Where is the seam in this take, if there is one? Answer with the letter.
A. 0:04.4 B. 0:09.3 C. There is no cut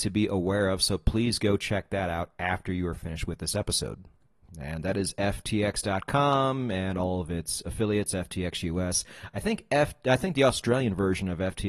A